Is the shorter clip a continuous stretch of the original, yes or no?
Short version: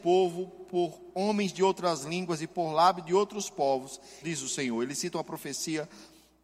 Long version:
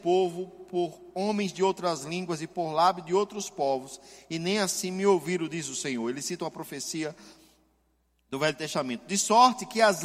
no